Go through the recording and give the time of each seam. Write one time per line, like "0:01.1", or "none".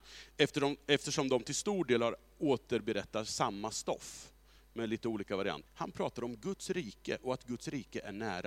0:05.7